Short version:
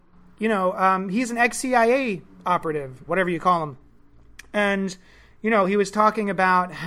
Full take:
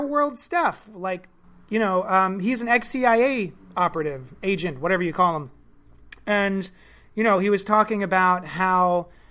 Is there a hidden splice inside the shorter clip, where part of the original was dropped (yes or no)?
yes